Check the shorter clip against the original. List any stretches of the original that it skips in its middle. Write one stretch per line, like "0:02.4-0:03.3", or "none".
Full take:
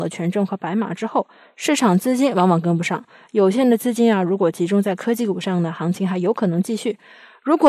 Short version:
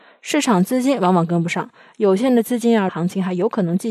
0:04.2-0:05.7